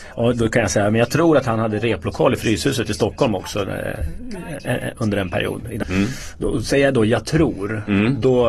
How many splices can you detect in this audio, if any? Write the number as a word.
one